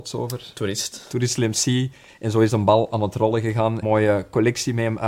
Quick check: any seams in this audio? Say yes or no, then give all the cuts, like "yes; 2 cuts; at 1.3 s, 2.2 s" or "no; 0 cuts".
yes; 2 cuts; at 2.1 s, 3.8 s